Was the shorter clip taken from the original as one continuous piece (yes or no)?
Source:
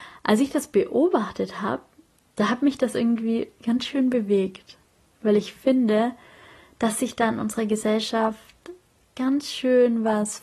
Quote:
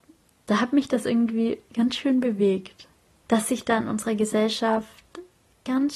no